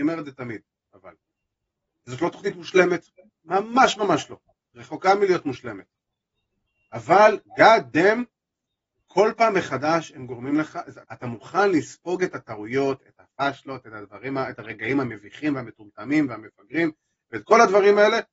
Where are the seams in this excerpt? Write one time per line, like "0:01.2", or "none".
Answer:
0:11.0